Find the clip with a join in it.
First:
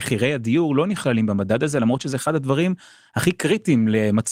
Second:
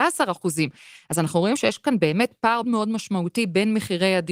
second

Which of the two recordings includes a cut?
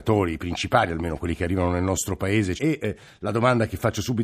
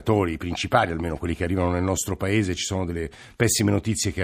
first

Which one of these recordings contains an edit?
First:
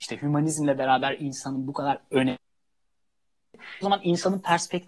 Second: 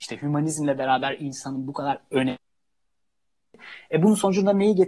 first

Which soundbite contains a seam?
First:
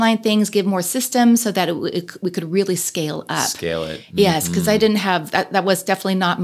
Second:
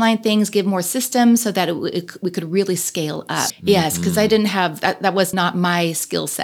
second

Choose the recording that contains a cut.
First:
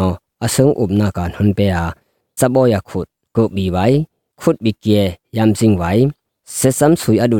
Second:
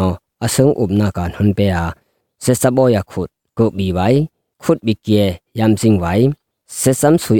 first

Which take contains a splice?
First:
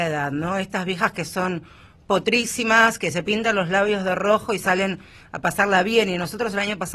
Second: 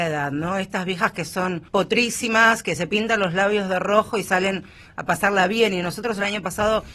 second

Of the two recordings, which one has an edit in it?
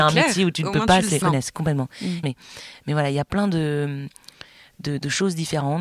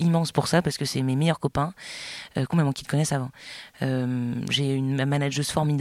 first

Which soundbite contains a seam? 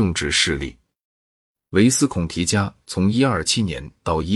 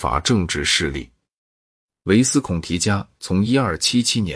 first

